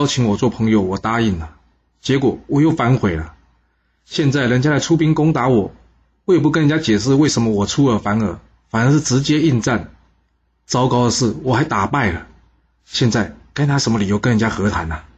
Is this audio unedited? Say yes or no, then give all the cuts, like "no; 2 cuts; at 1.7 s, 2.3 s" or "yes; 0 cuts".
yes; 0 cuts